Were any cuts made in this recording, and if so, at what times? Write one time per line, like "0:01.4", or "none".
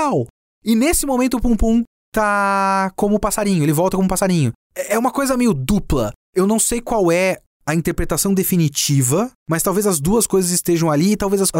0:04.7